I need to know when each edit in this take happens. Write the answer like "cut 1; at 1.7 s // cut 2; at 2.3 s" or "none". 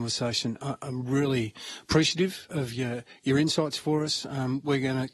none